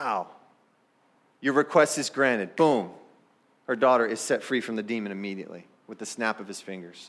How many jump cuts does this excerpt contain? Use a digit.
0